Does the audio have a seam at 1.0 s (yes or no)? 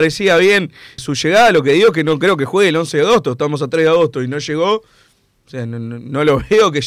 yes